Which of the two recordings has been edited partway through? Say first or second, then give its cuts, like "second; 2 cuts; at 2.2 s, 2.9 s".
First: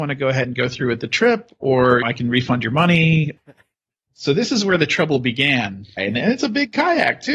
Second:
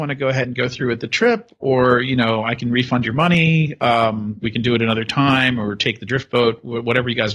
first; 3 cuts; at 2.0 s, 3.4 s, 6.0 s